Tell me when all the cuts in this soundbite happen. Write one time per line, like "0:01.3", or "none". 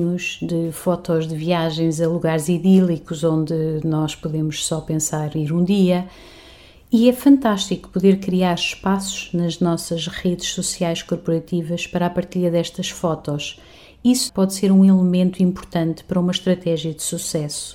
0:14.3